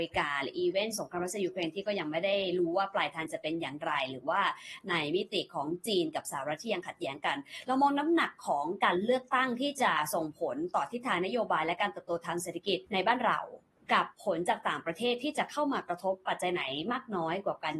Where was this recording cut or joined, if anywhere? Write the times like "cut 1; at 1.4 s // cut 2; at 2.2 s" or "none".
cut 1; at 12.9 s